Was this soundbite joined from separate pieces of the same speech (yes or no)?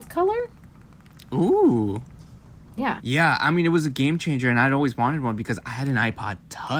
yes